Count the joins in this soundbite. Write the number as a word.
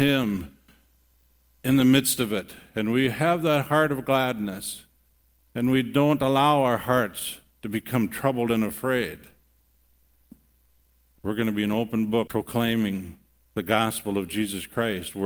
two